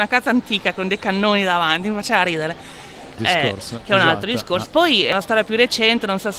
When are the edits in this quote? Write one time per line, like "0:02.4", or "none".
0:03.2
0:04.7